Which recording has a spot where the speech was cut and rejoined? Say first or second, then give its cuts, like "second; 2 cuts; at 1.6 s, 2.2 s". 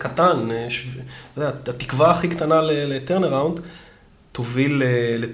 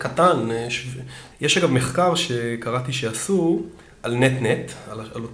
second; 1 cut; at 1.3 s